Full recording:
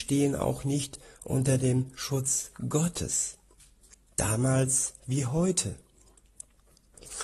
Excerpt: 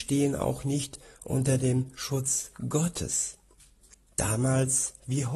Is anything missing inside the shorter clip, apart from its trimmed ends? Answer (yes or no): no